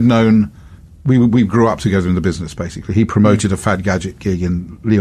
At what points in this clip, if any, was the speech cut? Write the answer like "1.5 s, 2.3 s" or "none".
none